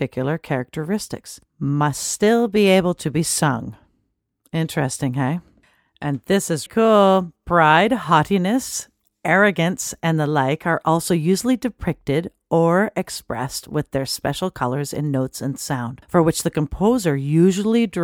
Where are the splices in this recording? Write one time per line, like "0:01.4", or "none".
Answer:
0:06.7